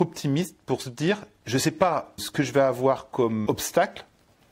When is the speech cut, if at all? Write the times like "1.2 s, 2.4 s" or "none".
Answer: 2.2 s, 3.5 s